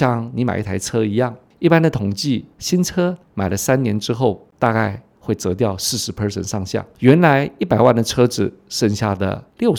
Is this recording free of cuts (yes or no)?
yes